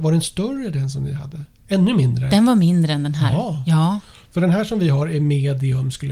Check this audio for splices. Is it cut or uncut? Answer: cut